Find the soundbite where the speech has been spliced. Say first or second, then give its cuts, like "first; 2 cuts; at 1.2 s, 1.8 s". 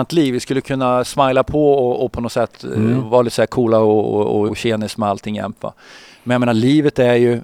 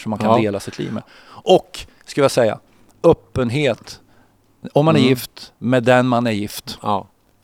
first; 1 cut; at 4.5 s